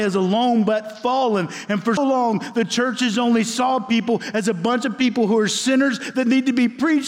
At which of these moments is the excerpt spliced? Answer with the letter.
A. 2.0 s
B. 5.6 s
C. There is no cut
A